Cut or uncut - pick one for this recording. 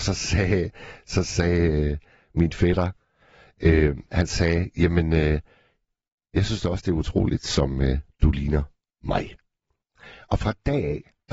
uncut